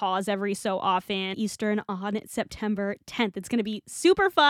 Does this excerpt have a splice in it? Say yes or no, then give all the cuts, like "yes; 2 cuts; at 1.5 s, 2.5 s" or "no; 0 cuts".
yes; 1 cut; at 1.3 s